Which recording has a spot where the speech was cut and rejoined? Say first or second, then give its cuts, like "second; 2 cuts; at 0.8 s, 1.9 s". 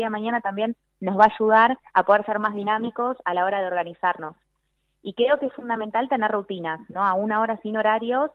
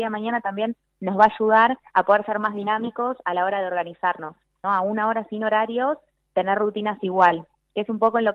second; 1 cut; at 4.6 s